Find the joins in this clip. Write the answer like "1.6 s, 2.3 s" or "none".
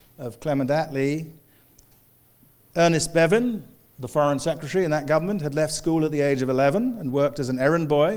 none